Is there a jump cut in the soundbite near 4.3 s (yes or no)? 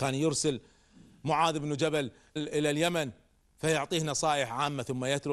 no